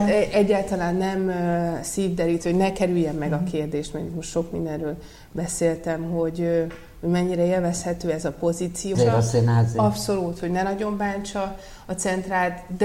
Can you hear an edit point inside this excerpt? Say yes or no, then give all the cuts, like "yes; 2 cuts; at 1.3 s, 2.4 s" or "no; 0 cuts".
yes; 1 cut; at 8.9 s